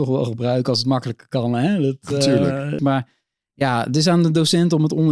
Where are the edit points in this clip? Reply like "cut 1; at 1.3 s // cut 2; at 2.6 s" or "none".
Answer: cut 1; at 2.8 s